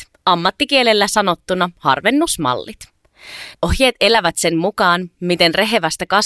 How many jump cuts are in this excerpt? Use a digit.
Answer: 1